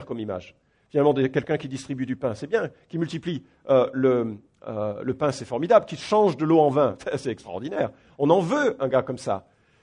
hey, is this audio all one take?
no; 1 cut; at 8.8 s

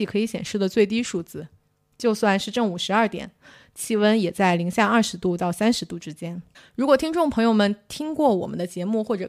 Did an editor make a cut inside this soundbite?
no; 0 cuts

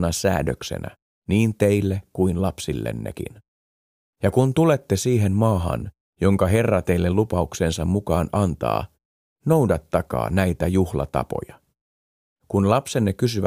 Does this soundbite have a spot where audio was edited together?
no; 0 cuts

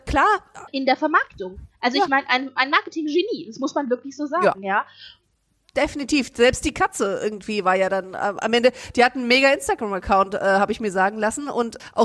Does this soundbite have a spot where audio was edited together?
no; 0 cuts

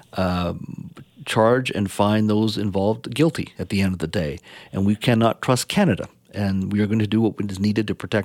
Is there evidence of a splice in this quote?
no; 0 cuts

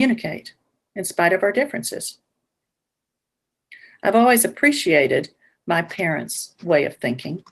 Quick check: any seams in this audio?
no; 0 cuts

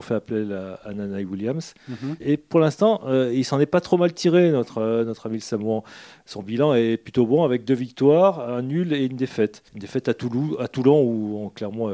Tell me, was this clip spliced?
yes; 2 cuts; at 2.2 s, 9.7 s

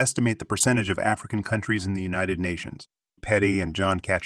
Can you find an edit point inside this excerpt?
yes; 1 cut; at 3.2 s

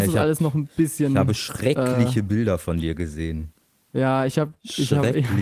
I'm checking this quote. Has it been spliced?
no; 0 cuts

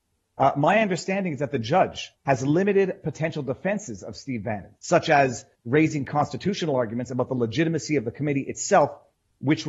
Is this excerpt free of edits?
no; 2 cuts; at 2.1 s, 4.7 s

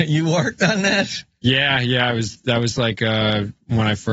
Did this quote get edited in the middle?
no; 0 cuts

